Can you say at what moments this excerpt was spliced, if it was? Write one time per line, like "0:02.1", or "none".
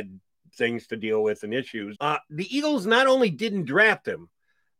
0:01.9